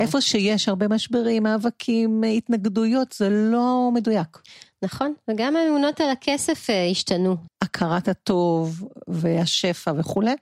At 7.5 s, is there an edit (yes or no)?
yes